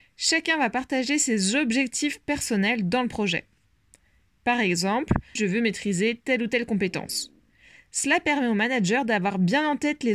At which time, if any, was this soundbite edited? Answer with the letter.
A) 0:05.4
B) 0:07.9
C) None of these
A